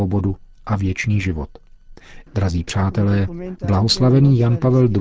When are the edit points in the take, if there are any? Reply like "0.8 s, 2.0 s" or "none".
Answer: 2.3 s